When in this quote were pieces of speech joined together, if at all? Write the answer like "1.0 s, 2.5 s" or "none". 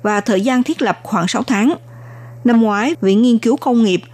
2.9 s

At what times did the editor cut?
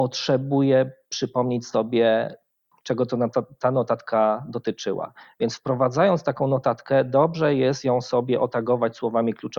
none

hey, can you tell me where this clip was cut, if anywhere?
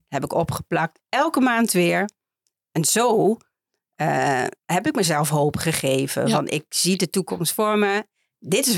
none

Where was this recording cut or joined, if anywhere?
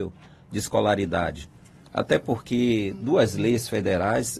none

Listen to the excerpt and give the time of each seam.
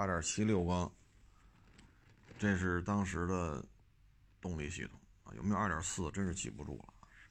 none

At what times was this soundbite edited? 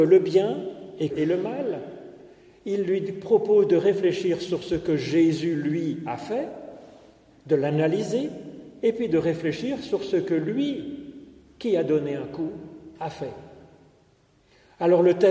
1.1 s

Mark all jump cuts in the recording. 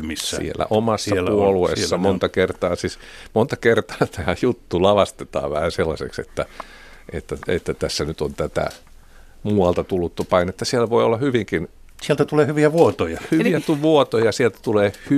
none

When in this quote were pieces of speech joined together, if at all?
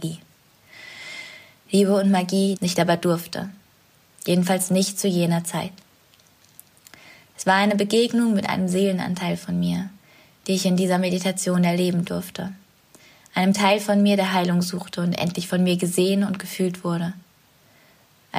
2.6 s

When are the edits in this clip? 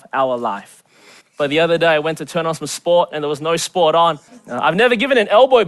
1.2 s, 4.3 s

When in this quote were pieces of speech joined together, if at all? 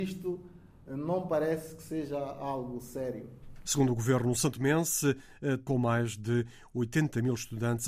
3.6 s, 5.6 s

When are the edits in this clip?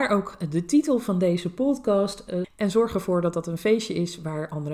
2.4 s

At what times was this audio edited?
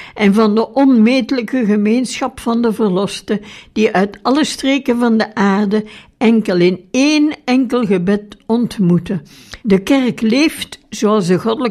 9.6 s

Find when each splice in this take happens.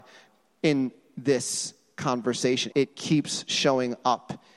2.7 s

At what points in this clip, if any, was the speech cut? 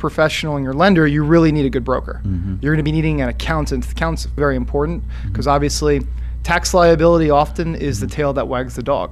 2.6 s, 4.4 s

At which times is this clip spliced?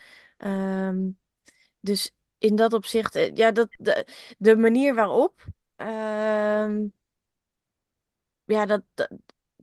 none

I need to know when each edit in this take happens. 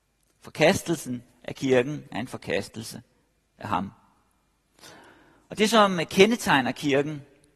none

